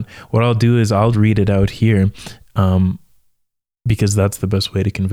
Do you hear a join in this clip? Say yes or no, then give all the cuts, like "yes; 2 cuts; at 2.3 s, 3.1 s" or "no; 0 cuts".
yes; 1 cut; at 1.1 s